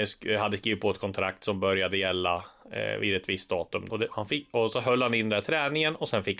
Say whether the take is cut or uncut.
cut